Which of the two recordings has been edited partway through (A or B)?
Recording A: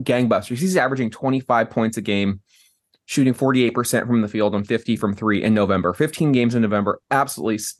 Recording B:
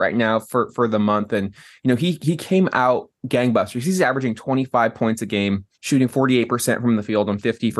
B